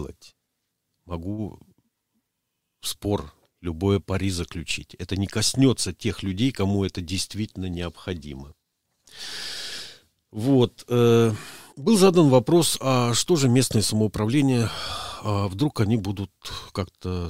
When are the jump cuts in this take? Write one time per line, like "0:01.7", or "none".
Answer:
0:11.7